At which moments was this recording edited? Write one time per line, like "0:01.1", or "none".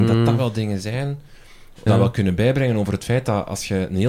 0:01.9